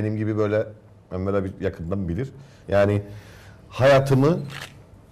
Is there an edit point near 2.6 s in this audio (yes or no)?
yes